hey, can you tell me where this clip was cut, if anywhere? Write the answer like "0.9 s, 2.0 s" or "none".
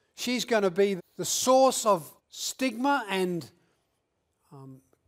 1.0 s, 2.2 s